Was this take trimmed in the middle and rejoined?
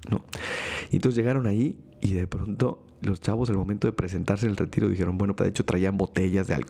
yes; 2 cuts; at 3.0 s, 5.4 s

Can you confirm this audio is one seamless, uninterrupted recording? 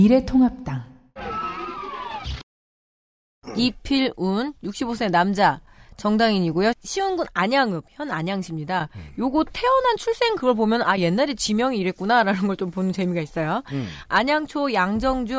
yes; 0 cuts

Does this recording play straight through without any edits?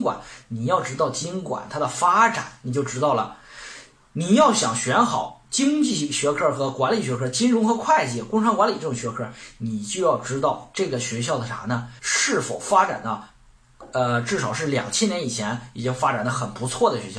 no; 1 cut; at 12.0 s

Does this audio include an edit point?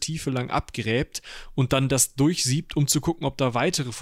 no; 0 cuts

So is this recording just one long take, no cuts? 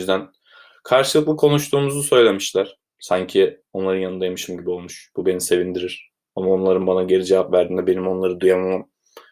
no; 1 cut; at 2.9 s

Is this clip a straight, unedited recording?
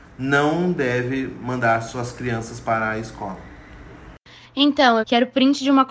no; 1 cut; at 5.0 s

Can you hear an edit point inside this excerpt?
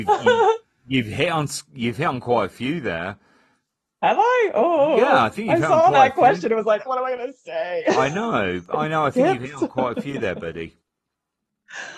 yes; 1 cut; at 6.9 s

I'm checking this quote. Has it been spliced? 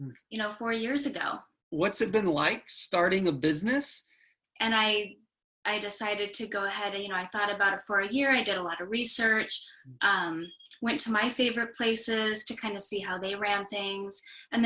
yes; 1 cut; at 4.4 s

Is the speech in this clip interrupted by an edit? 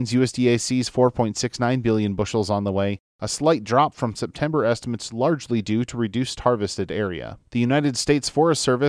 yes; 1 cut; at 7.5 s

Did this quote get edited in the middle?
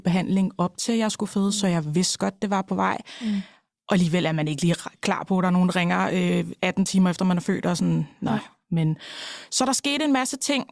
no; 0 cuts

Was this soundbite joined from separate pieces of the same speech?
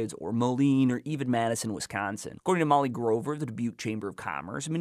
no; 0 cuts

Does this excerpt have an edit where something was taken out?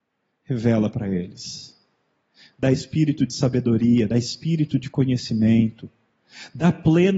no; 0 cuts

